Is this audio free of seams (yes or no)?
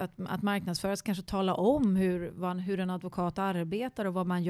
yes